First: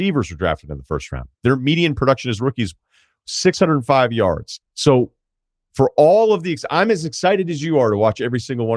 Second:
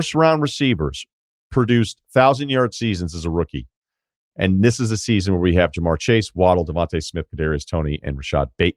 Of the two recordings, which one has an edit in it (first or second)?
first